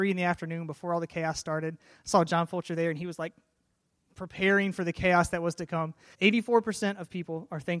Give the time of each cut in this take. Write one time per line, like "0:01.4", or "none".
0:06.1